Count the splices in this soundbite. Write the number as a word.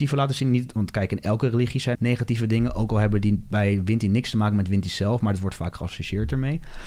one